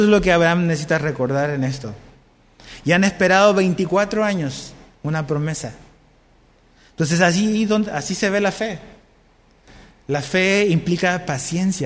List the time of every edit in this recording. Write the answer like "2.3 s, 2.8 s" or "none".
none

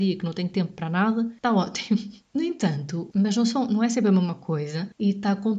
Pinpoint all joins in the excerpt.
3.1 s

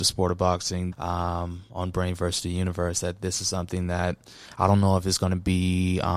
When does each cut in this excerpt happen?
0.9 s

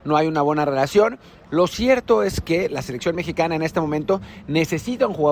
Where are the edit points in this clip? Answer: 1.5 s

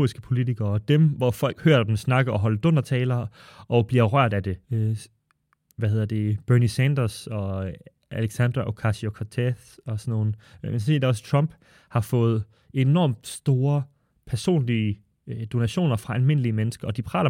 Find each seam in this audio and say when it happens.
4.6 s

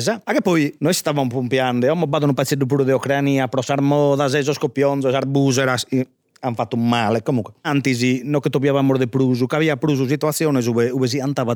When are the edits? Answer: 7.6 s

